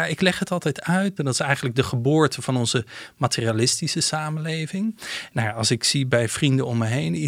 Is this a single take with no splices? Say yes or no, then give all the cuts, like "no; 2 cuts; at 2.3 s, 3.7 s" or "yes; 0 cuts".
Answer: no; 2 cuts; at 1.2 s, 5.3 s